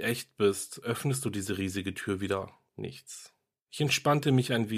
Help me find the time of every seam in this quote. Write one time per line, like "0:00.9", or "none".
0:02.7